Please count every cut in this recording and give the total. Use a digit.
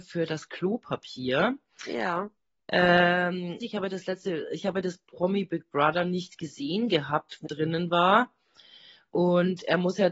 2